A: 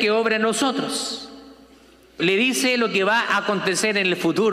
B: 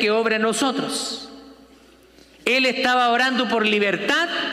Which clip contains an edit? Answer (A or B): A